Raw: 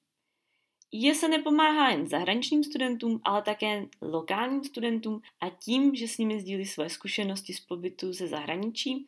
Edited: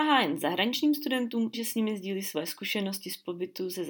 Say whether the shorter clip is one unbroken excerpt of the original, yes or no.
no